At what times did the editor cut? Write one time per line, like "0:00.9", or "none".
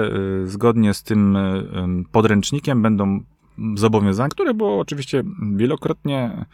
0:04.3